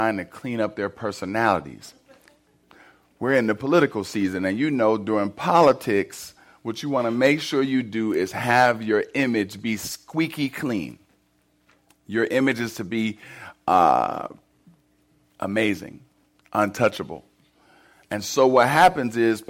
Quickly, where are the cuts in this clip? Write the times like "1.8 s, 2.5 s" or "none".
none